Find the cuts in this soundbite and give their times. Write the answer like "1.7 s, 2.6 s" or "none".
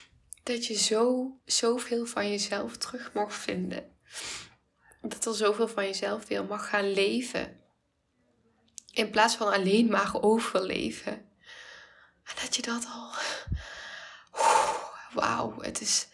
1.4 s